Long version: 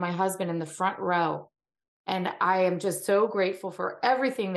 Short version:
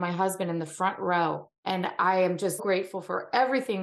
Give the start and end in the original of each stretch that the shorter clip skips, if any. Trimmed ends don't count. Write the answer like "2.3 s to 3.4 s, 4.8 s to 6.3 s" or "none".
1.6 s to 2.0 s, 3.0 s to 3.3 s